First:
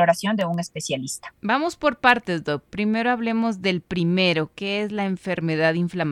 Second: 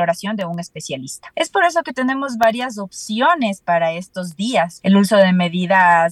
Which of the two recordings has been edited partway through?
second; 2 cuts; at 1.3 s, 4.8 s

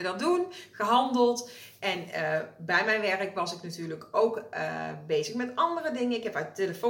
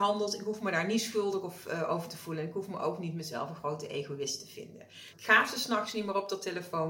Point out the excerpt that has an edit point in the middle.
second; 1 cut; at 5.1 s

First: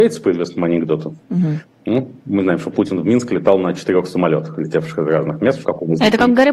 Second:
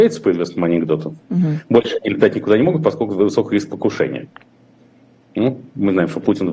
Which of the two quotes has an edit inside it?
first; 2 cuts; at 1.6 s, 5.6 s

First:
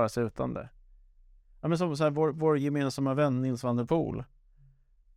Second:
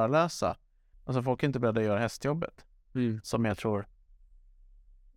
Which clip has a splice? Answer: second; 1 cut; at 0.9 s

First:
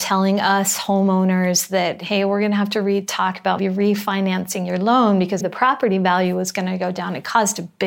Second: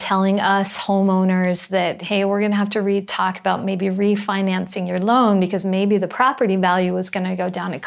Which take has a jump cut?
first; 2 cuts; at 3.6 s, 5.4 s

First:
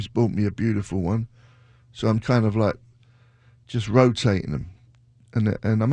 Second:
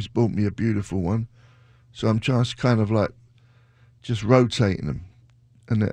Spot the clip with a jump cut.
first; 1 cut; at 2.2 s

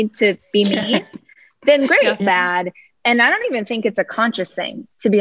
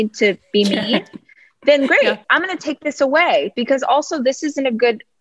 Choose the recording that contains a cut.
first; 1 cut; at 2.2 s

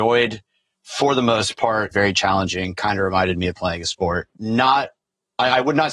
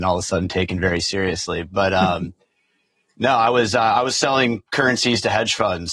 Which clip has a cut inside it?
first; 2 cuts; at 1.9 s, 4.4 s

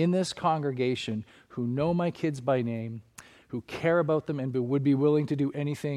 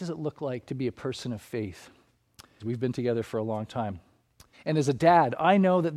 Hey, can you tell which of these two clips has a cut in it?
second; 2 cuts; at 2.6 s, 4.5 s

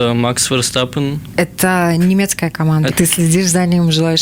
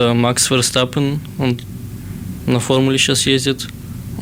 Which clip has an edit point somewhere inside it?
first; 2 cuts; at 1.3 s, 2.9 s

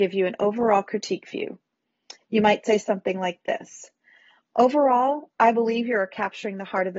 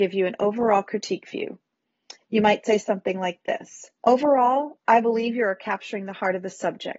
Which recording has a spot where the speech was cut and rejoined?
second; 1 cut; at 4.0 s

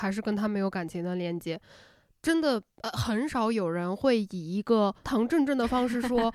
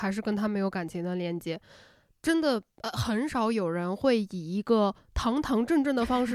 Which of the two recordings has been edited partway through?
first; 1 cut; at 5.0 s

